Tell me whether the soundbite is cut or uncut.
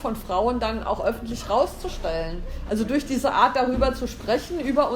cut